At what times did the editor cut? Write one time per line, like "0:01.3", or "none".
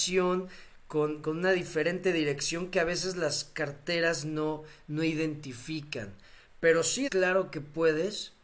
0:01.2
0:07.1

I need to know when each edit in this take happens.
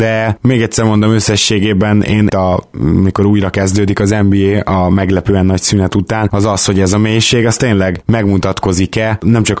0:02.3

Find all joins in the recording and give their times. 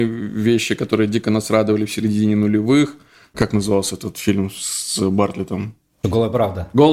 none

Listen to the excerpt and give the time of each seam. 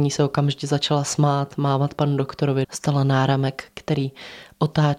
0:02.6

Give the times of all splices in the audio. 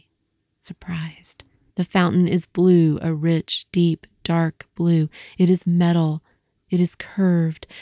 0:01.7

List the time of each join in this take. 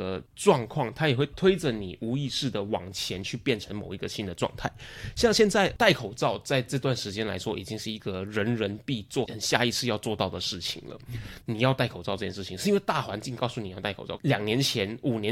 0:09.2
0:11.4
0:14.2

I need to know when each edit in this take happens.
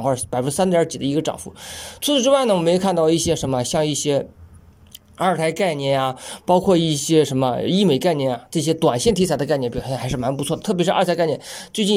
none

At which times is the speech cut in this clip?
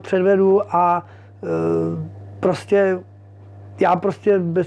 none

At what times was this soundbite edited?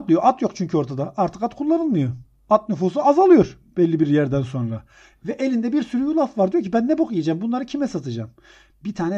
none

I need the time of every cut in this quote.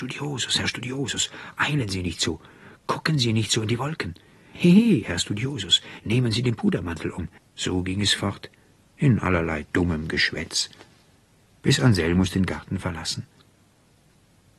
0:04.5
0:07.4

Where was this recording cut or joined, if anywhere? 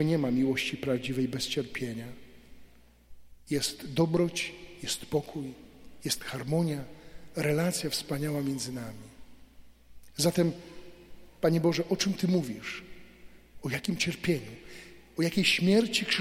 0:03.4

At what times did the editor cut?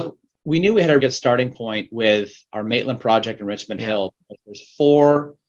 0:01.0

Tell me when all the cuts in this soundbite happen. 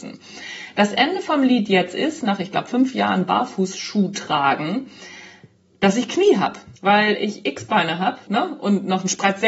0:06.8
0:08.3

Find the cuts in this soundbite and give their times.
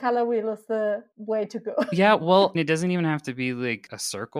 0:02.5

